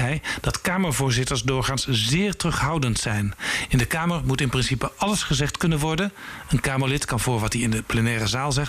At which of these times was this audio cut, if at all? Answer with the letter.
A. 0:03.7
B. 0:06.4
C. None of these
C